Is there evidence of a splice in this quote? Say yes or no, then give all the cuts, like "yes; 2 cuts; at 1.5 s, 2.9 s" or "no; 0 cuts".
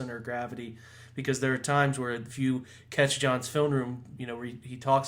yes; 1 cut; at 4.2 s